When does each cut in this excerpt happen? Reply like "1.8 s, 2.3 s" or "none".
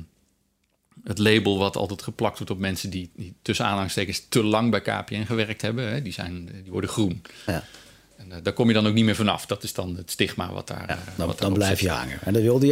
none